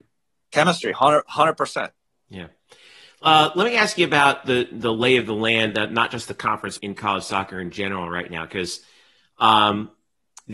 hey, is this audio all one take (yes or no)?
no